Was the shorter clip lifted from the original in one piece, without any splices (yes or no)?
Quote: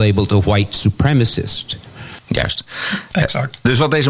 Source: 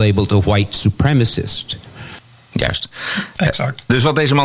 no